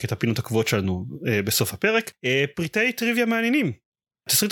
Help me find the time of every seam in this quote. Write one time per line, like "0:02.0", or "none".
none